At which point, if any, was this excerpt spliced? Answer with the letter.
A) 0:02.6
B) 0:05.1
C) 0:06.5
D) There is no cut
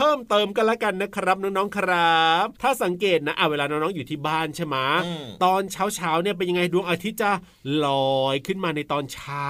A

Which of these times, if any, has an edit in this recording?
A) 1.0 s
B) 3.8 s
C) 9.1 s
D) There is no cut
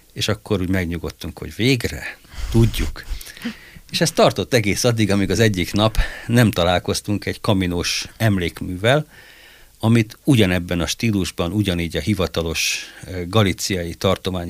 D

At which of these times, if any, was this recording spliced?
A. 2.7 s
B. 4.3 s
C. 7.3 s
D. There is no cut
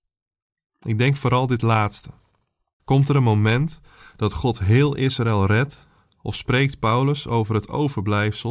A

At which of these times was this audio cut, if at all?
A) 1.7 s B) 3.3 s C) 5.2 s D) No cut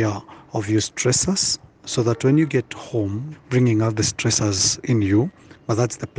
B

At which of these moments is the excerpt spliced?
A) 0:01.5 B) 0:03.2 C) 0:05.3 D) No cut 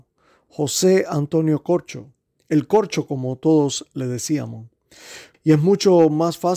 C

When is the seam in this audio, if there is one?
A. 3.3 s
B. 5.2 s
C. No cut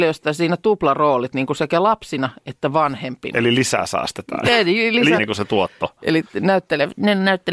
B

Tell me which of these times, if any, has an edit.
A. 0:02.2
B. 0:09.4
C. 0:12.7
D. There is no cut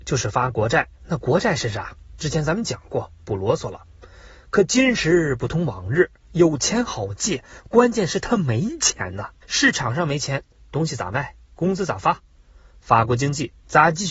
B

